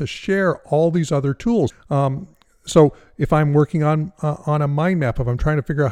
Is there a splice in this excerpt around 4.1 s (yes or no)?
no